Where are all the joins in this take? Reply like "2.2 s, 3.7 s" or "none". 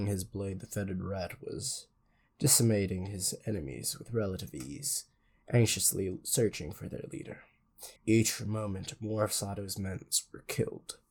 8.0 s